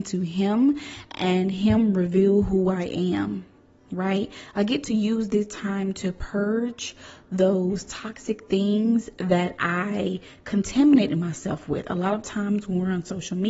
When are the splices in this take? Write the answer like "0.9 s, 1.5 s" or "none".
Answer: none